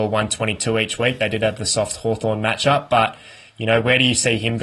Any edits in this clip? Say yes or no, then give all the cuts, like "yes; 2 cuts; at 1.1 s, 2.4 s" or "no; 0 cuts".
no; 0 cuts